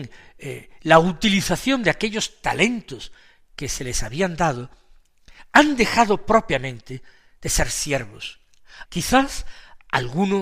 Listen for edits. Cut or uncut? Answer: cut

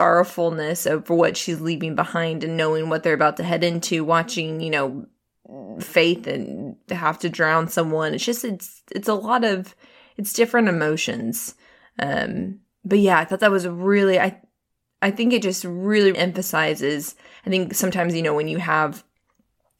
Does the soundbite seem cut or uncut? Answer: cut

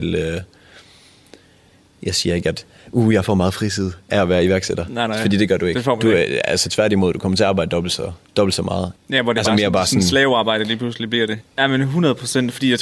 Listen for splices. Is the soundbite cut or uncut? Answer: cut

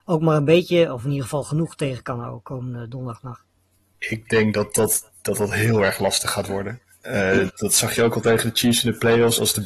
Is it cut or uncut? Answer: cut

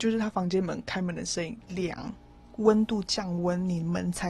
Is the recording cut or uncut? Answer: cut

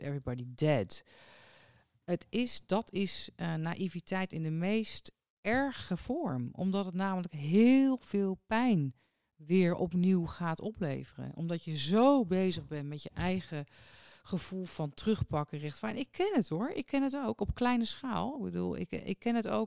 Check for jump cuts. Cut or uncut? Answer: uncut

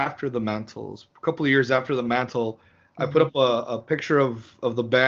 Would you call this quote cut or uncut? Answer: uncut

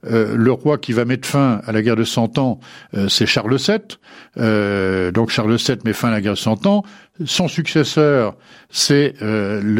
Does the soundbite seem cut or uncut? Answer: uncut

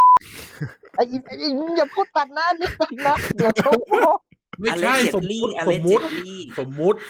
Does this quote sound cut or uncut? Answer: uncut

